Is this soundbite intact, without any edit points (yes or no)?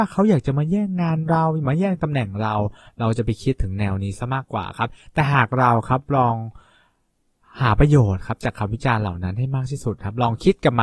yes